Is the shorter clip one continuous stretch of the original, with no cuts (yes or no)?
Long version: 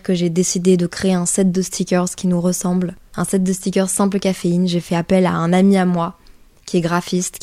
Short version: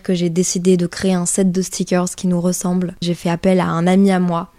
no